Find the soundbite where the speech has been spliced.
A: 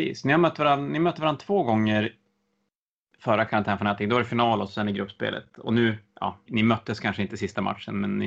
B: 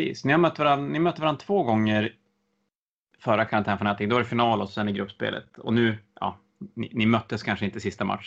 A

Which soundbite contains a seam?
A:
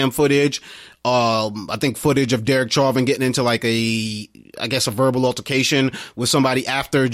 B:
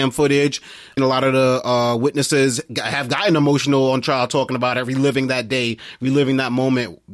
B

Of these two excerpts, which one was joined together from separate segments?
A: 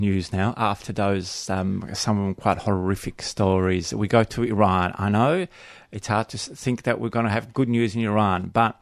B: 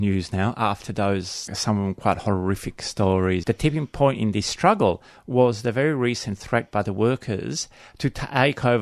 B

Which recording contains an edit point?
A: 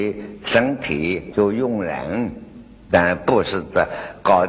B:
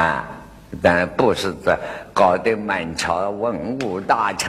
A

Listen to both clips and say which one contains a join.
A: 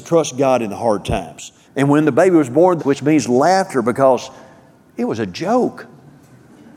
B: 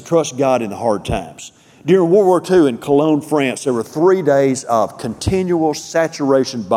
A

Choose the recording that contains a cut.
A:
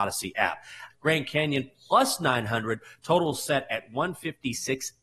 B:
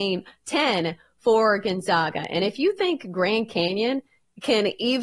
A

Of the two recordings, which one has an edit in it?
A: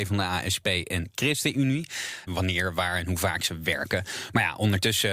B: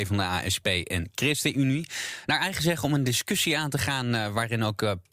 A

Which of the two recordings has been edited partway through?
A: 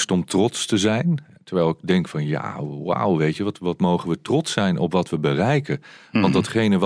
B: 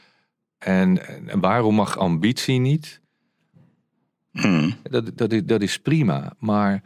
B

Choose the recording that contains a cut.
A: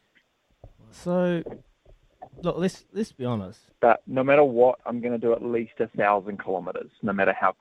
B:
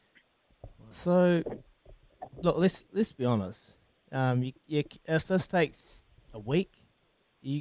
A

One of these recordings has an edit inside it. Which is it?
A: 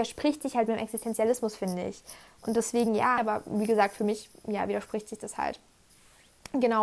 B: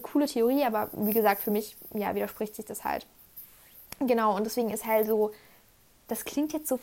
A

